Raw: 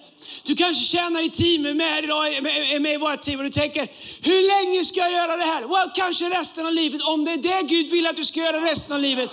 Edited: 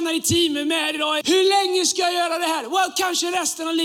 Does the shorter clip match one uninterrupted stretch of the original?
no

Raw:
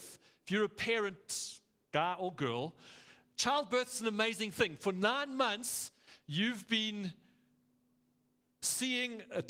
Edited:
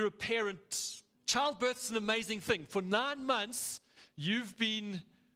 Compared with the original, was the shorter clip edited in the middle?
yes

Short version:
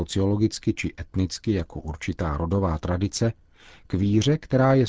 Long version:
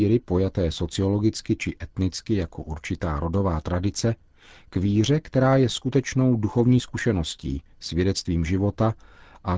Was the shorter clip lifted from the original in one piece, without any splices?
yes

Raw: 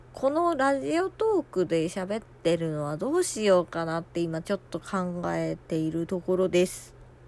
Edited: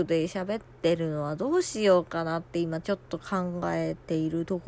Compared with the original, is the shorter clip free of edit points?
yes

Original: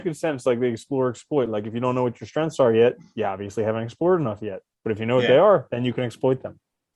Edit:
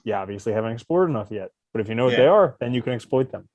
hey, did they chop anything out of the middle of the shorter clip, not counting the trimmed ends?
no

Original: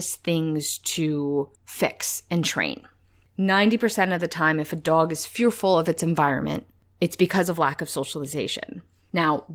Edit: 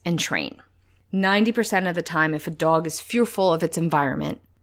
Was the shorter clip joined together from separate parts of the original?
no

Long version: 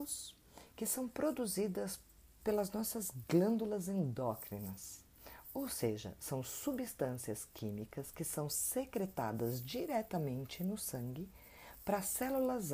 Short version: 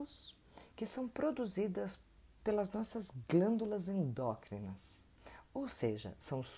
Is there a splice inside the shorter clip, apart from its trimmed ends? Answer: no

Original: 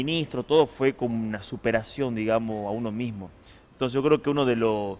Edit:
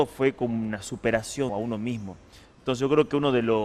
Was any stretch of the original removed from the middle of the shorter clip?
yes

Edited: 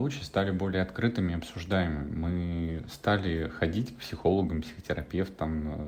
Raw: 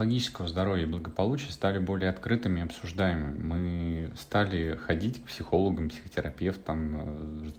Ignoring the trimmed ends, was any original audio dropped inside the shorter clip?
no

